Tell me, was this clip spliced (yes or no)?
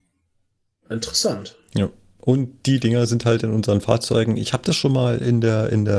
no